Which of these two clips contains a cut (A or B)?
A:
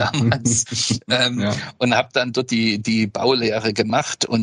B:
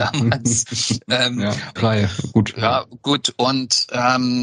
B